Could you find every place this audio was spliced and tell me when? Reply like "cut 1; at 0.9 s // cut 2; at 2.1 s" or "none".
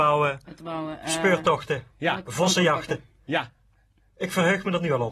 none